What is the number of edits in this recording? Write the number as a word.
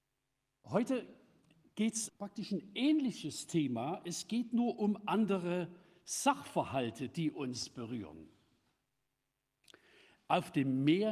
one